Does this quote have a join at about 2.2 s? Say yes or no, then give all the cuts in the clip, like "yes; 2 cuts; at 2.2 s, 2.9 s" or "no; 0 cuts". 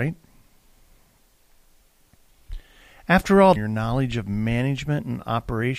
no; 1 cut; at 3.6 s